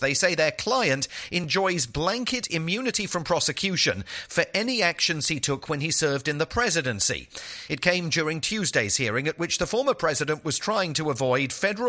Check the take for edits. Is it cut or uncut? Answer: uncut